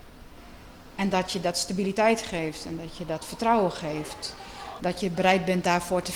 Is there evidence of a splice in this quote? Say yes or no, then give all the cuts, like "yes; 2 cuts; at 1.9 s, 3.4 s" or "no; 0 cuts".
yes; 1 cut; at 4.8 s